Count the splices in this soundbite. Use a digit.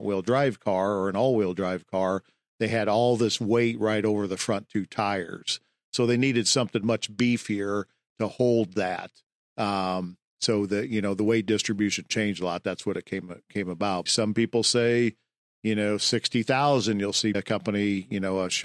2